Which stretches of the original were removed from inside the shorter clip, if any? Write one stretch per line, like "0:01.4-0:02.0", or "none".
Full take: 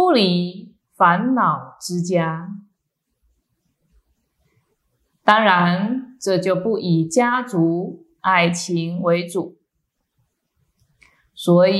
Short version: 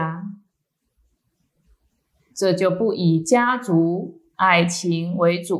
0:04.6-0:06.1